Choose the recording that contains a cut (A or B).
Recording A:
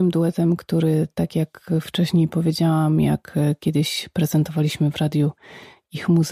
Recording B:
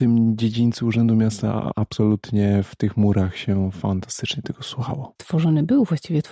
B